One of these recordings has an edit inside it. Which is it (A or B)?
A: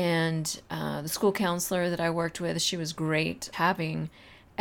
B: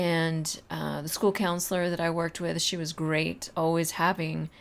A